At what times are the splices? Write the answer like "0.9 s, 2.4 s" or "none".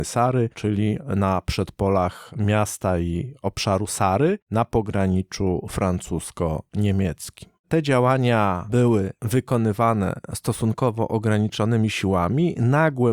none